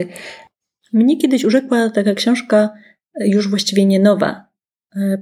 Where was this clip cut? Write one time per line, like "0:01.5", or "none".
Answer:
none